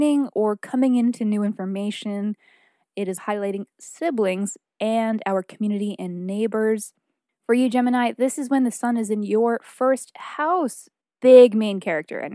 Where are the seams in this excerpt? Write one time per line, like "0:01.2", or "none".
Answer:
0:03.2